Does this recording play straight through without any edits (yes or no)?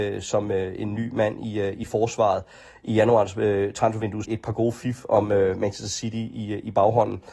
no